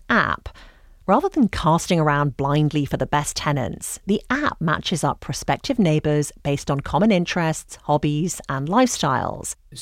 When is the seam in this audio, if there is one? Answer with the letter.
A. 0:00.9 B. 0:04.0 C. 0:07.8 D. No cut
D